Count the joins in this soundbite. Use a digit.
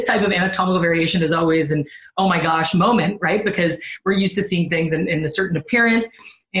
0